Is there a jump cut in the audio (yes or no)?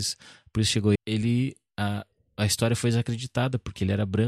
yes